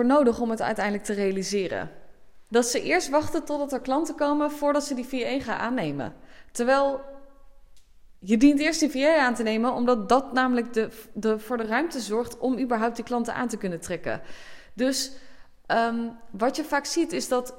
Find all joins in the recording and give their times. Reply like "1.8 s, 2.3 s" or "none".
2.5 s